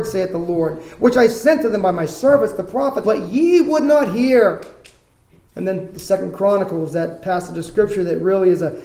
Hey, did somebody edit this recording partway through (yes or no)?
yes